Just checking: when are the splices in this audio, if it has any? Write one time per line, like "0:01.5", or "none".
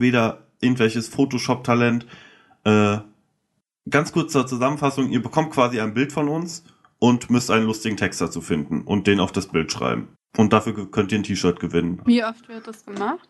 0:10.1
0:12.1